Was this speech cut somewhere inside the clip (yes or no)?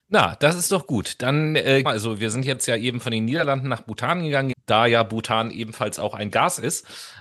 yes